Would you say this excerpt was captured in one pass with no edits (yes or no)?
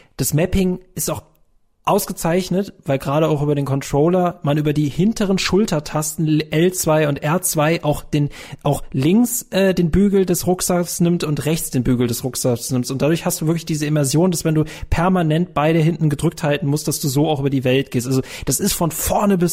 yes